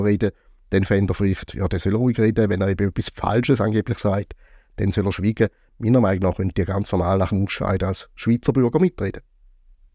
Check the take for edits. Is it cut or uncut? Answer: uncut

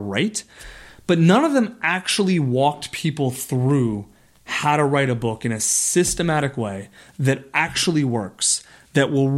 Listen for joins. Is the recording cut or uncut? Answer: uncut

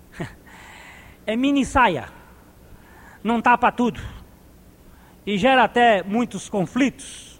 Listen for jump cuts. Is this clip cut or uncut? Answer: uncut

